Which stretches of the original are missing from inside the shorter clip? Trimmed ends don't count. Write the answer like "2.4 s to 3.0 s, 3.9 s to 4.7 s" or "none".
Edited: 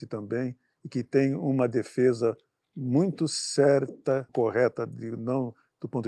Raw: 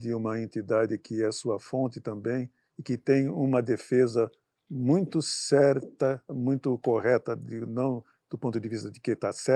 6.2 s to 6.8 s